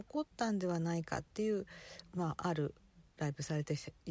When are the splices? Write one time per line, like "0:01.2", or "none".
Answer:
0:03.1